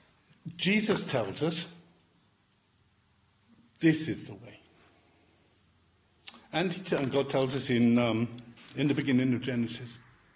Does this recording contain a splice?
no; 0 cuts

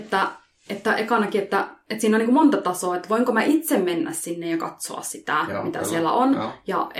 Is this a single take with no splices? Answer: yes; 0 cuts

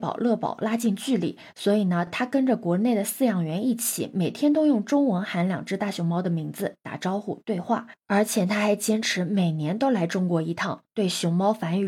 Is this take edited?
no; 0 cuts

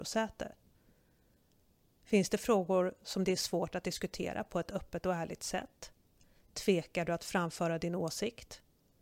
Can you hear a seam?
no; 0 cuts

